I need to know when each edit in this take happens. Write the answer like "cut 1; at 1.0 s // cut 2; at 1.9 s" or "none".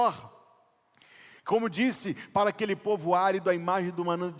none